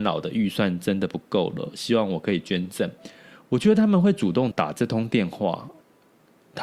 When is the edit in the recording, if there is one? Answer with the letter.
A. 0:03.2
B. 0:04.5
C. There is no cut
B